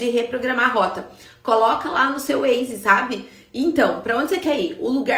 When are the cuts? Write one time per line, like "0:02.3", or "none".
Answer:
none